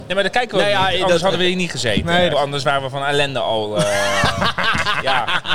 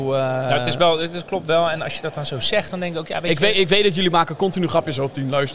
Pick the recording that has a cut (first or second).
first